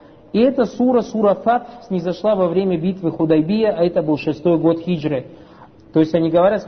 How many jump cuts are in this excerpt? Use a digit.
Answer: 1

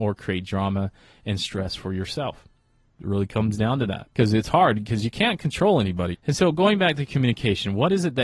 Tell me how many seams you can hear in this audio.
2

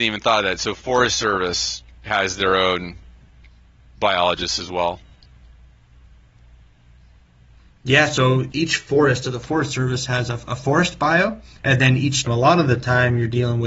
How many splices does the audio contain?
2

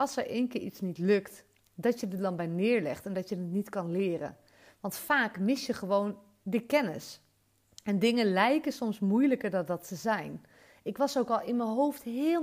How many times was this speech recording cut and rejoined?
0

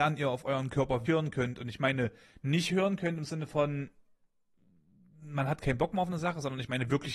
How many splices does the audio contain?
1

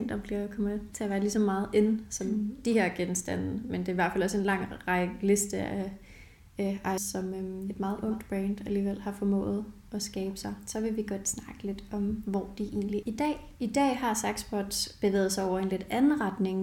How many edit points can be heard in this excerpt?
2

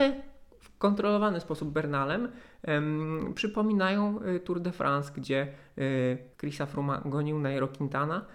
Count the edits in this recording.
1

